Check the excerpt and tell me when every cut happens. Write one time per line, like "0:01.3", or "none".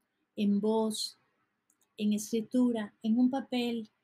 none